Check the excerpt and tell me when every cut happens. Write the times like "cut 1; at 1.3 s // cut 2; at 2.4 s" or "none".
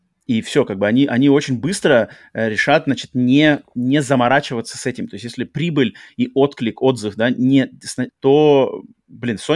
cut 1; at 8.1 s

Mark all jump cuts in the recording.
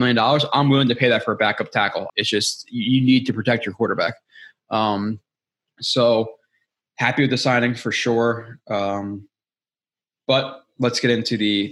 cut 1; at 2.1 s

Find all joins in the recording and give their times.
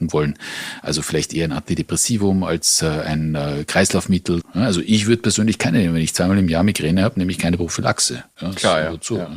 cut 1; at 4.4 s

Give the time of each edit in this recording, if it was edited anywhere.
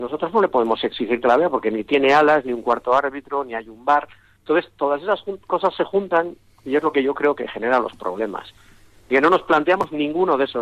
none

